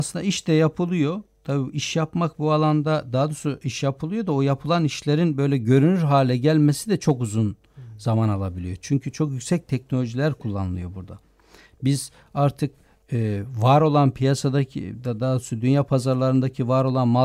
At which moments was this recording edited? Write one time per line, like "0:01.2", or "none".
none